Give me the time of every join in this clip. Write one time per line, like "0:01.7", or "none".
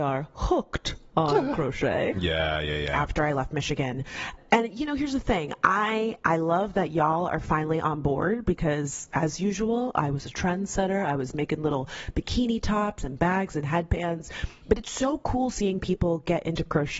0:02.1